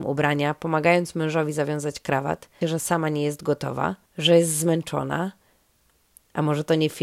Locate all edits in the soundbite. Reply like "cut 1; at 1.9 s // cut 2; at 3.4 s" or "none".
cut 1; at 2.6 s // cut 2; at 4.1 s